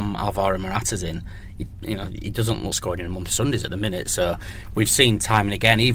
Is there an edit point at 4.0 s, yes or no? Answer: no